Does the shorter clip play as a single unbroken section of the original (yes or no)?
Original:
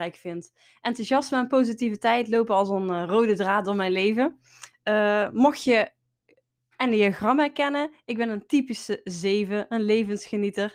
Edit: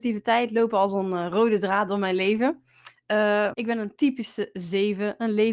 no